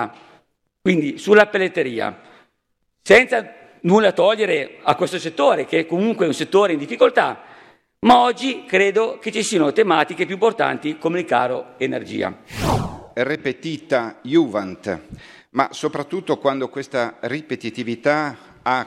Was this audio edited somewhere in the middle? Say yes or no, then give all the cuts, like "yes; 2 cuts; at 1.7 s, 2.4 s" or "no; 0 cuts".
no; 0 cuts